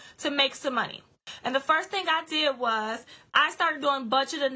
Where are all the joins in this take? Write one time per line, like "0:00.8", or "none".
none